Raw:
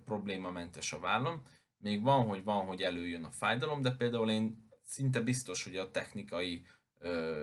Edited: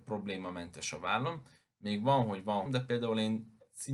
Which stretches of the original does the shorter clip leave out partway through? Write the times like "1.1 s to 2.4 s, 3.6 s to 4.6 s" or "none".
2.7 s to 3.8 s